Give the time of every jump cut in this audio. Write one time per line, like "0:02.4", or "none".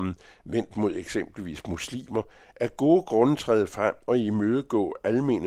none